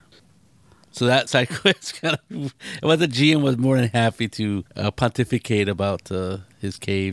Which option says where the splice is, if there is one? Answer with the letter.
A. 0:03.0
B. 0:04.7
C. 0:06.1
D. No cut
B